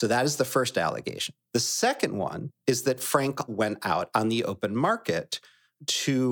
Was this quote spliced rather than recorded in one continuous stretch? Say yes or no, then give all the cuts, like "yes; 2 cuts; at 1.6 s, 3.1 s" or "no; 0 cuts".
yes; 2 cuts; at 1.4 s, 3.5 s